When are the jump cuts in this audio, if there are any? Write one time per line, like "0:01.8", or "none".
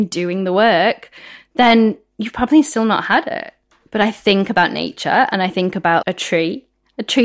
0:03.9
0:06.0